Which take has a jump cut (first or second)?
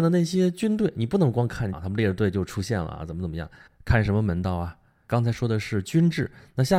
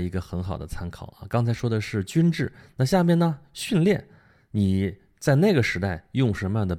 first